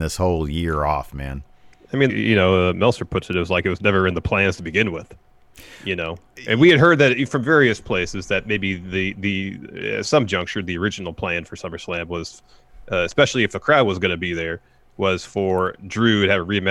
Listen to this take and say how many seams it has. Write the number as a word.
one